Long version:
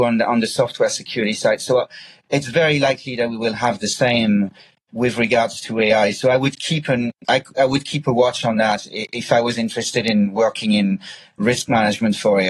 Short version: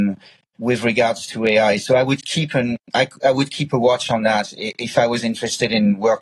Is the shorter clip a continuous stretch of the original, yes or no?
yes